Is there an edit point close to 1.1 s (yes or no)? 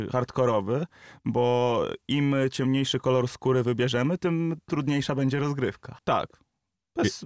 no